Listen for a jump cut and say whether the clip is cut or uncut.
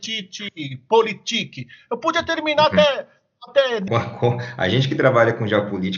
cut